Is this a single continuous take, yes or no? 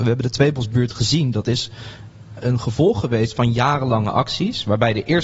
no